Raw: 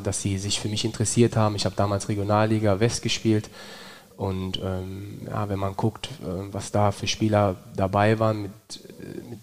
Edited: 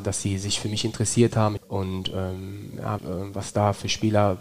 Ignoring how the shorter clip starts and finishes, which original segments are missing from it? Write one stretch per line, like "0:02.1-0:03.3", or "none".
0:01.6-0:04.1
0:05.5-0:06.2